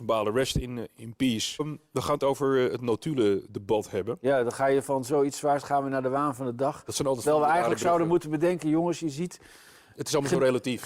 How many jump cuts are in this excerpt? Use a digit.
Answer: 1